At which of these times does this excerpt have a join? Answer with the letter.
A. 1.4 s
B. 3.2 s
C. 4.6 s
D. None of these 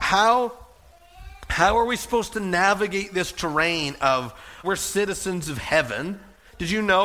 C